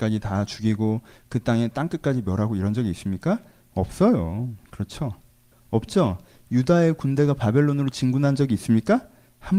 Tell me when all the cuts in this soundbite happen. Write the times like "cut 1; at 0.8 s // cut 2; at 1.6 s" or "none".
cut 1; at 5.5 s